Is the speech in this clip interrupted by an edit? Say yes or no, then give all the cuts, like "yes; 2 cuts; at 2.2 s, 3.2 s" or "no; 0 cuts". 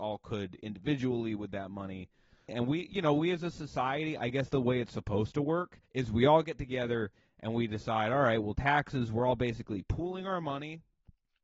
yes; 2 cuts; at 2.5 s, 5.9 s